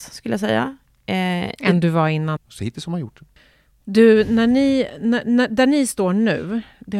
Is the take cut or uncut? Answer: cut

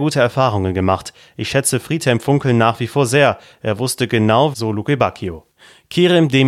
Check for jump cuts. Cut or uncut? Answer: cut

